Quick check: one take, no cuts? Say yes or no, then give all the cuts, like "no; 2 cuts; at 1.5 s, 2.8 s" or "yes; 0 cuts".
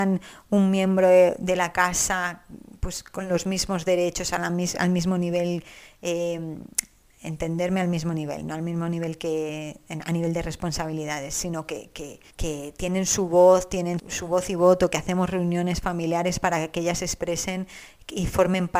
no; 2 cuts; at 12.3 s, 14.0 s